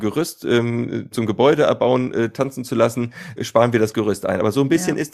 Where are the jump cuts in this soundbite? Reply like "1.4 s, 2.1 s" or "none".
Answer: 1.1 s, 3.4 s

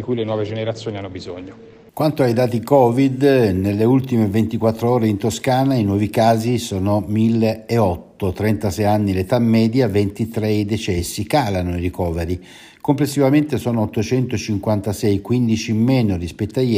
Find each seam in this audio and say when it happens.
1.9 s

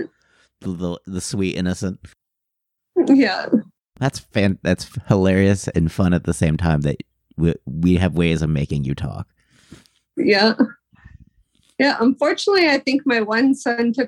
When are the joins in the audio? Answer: none

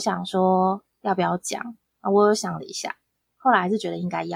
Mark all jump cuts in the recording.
1.9 s

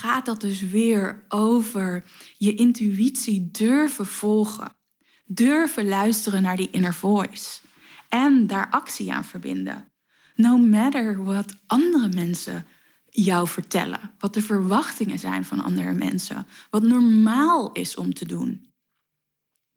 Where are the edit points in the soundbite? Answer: none

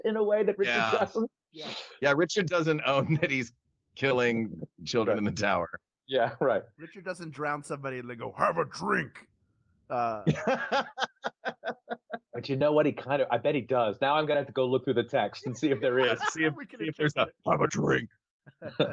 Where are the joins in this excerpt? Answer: none

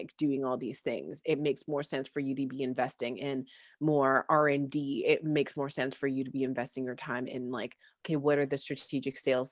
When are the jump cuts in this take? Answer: none

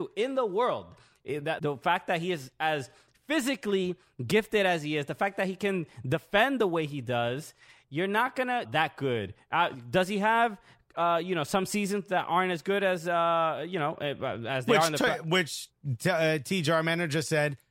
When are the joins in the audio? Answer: 1.6 s, 8.7 s

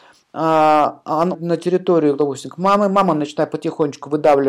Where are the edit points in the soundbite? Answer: 1.3 s

